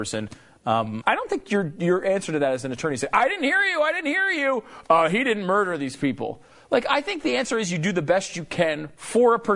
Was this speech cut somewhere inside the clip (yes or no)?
yes